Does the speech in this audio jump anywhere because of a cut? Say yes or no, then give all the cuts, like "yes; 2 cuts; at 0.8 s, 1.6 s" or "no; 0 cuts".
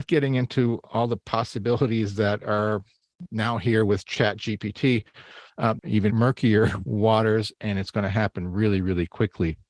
yes; 1 cut; at 5.8 s